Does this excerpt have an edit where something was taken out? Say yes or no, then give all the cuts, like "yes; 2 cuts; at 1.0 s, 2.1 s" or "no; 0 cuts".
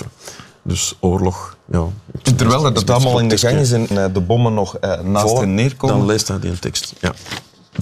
yes; 1 cut; at 3.9 s